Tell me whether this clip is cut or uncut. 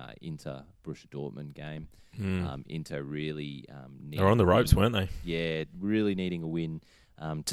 uncut